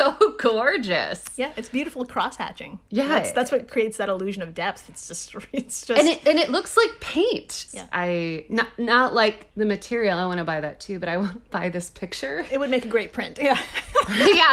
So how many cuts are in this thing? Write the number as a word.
two